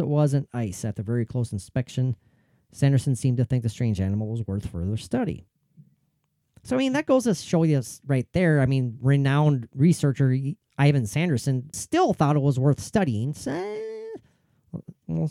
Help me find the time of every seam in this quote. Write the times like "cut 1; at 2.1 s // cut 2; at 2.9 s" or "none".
cut 1; at 11.7 s